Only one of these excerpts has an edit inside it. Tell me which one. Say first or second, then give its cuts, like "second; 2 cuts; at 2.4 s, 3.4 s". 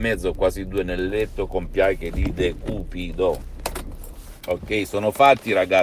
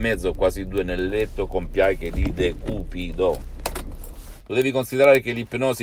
second; 1 cut; at 4.4 s